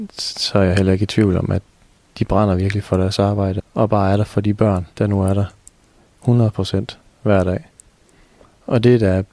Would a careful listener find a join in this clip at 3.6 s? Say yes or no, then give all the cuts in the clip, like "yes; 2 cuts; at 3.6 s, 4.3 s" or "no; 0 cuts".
yes; 2 cuts; at 3.6 s, 4.9 s